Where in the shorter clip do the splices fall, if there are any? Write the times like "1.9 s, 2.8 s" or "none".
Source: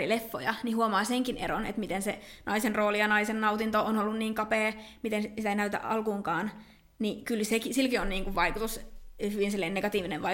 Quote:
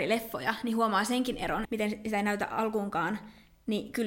1.7 s